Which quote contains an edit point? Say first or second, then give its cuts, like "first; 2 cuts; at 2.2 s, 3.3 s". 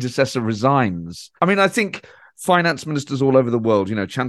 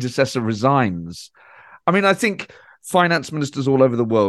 first; 1 cut; at 1.4 s